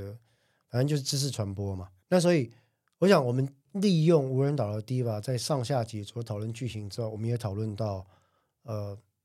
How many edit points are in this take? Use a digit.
2